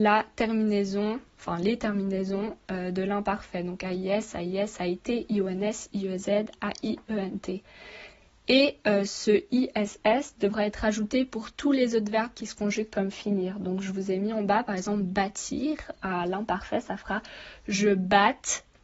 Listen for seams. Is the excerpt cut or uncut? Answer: uncut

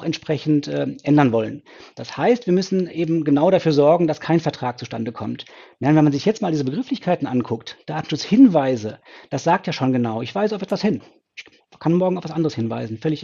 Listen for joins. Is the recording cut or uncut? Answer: uncut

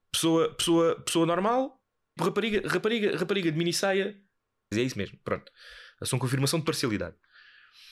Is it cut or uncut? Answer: cut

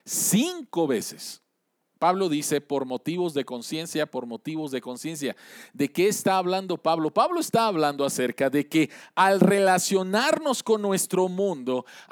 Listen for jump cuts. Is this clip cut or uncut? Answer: cut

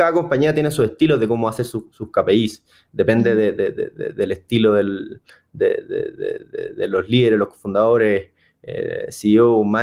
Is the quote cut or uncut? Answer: uncut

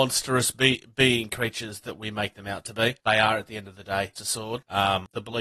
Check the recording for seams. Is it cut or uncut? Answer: cut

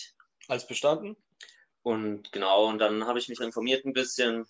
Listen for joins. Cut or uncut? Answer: cut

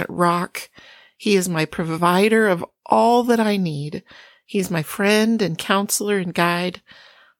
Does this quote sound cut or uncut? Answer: uncut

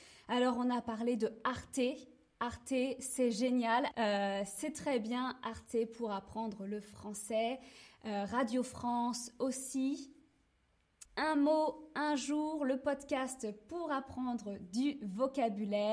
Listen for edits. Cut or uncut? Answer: cut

